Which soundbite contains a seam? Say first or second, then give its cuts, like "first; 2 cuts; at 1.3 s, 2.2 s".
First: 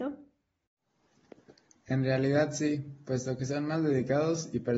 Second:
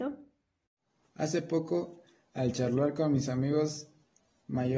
second; 1 cut; at 1.0 s